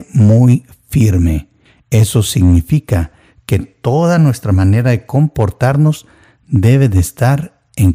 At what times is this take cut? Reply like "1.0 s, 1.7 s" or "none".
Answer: none